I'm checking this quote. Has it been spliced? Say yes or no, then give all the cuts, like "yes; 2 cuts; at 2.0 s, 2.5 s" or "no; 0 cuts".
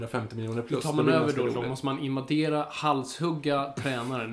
no; 0 cuts